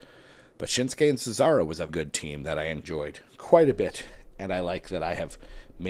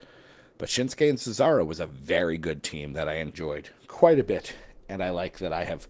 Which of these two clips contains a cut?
first; 1 cut; at 1.9 s

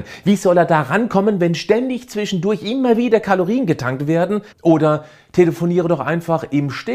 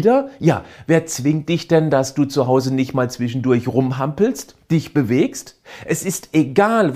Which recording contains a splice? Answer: first; 1 cut; at 4.5 s

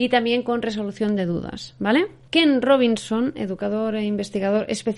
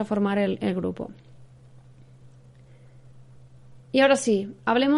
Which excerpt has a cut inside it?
first; 1 cut; at 2.3 s

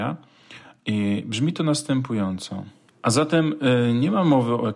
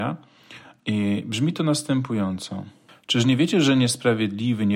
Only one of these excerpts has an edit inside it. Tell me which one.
first; 1 cut; at 2.9 s

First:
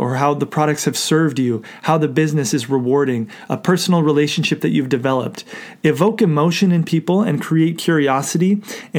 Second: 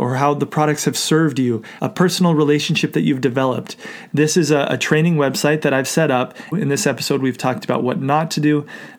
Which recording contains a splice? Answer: second; 3 cuts; at 1.8 s, 4.1 s, 6.5 s

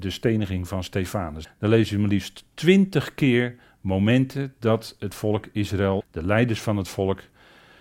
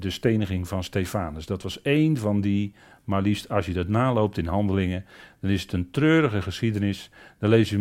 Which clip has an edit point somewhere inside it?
first; 2 cuts; at 1.4 s, 6.0 s

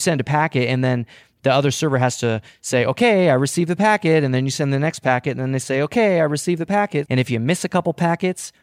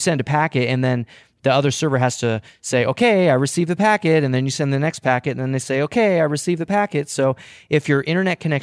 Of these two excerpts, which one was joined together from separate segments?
first; 1 cut; at 7.1 s

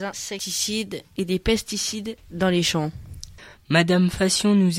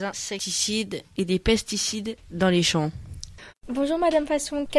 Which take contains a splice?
second; 1 cut; at 3.5 s

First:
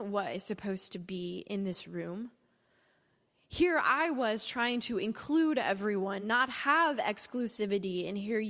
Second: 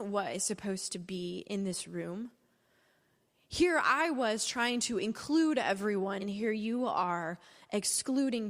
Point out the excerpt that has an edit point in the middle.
second; 1 cut; at 6.2 s

